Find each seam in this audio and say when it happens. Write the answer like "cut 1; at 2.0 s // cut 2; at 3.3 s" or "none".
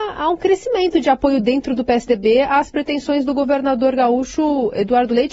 none